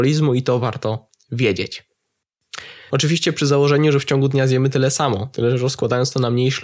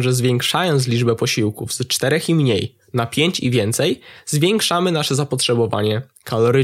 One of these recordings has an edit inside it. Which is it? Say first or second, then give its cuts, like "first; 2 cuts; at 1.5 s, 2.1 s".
first; 1 cut; at 2.9 s